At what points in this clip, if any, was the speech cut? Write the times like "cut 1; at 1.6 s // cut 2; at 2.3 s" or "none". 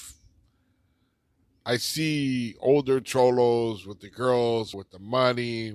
cut 1; at 4.7 s